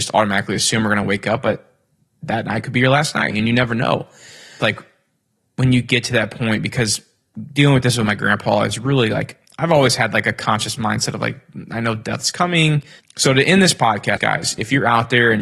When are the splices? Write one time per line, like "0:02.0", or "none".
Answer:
0:04.6
0:13.0
0:14.2

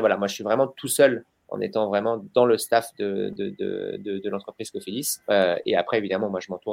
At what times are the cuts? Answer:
0:05.2

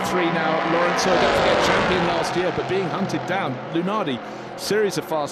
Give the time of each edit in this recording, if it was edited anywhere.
none

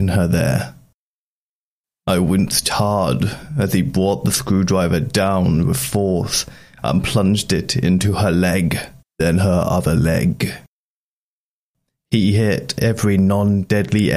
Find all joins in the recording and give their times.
0:09.0

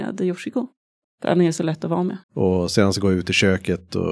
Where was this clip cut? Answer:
0:01.0
0:02.2

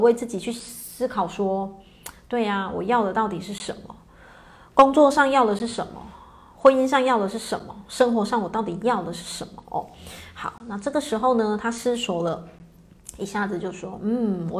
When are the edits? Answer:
none

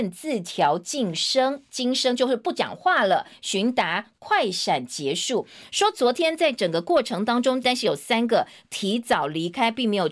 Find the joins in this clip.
0:07.6

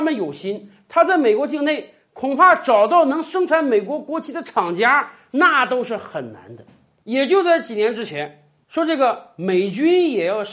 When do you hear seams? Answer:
0:07.0
0:08.6

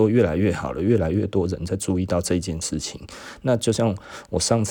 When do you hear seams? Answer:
none

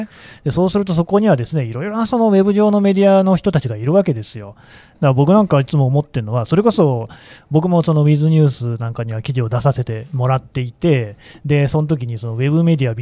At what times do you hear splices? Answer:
0:04.9

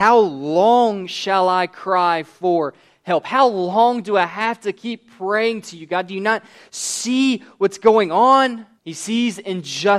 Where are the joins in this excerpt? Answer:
0:08.8

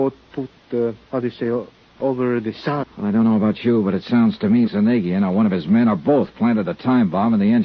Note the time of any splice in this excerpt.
0:01.0
0:02.8
0:04.7

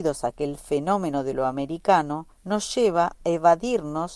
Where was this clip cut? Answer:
0:02.3

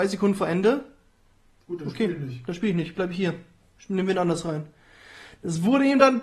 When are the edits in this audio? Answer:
none

